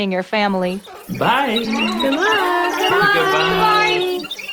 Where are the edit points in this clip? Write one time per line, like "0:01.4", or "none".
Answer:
none

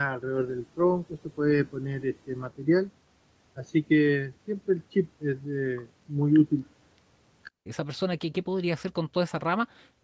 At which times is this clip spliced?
0:05.2
0:07.7

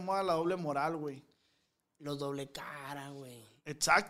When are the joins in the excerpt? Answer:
none

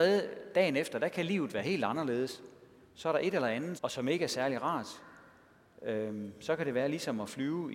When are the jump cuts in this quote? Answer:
0:03.8

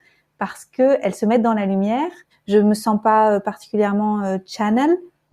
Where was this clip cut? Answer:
0:02.3

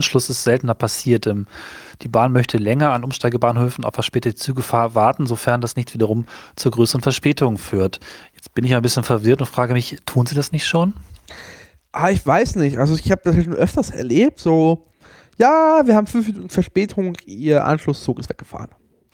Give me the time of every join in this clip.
none

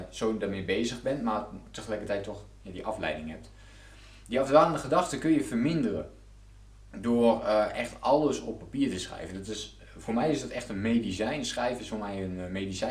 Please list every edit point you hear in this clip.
none

